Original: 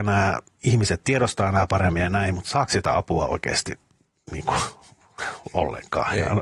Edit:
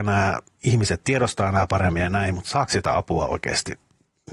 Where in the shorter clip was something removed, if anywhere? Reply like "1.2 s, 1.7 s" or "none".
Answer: none